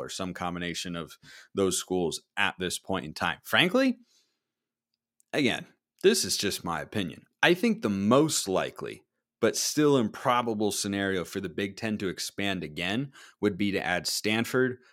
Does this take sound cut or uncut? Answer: uncut